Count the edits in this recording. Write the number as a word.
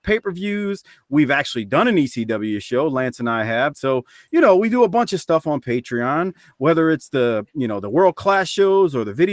one